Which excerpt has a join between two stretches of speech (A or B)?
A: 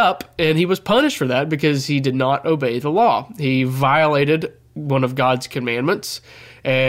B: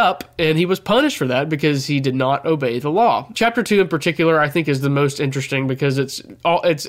B